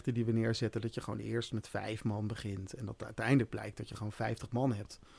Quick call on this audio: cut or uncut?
uncut